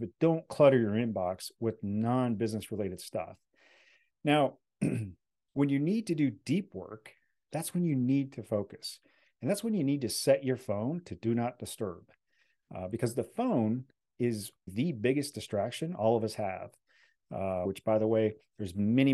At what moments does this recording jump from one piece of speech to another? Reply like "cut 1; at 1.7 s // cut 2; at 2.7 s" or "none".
cut 1; at 14.7 s // cut 2; at 17.7 s